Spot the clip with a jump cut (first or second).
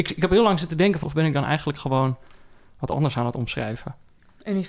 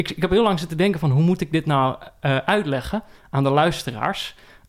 first